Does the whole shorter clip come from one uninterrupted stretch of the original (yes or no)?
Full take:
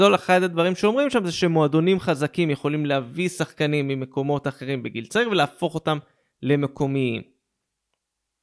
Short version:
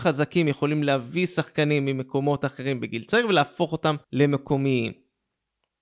no